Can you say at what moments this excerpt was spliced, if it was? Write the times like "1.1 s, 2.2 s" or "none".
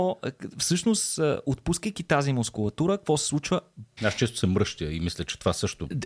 4.0 s